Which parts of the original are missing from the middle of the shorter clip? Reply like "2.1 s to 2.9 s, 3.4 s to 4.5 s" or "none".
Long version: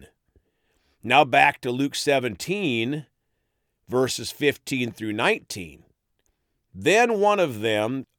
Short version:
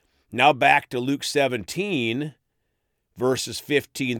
none